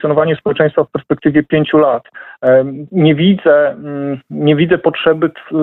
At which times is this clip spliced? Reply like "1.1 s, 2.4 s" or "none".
2.9 s